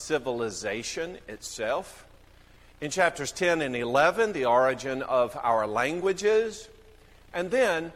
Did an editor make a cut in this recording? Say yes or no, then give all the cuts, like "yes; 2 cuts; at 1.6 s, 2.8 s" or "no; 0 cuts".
no; 0 cuts